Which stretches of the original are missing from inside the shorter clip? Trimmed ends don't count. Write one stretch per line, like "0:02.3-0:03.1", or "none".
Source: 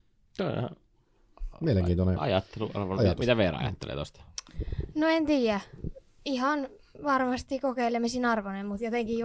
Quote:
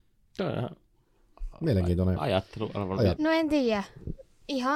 0:03.2-0:04.9